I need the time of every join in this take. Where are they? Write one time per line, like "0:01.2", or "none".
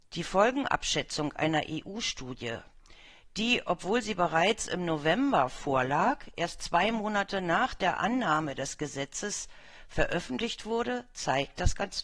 none